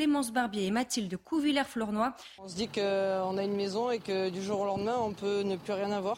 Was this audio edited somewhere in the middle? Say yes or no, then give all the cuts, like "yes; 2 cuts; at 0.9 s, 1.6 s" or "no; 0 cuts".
yes; 1 cut; at 2.4 s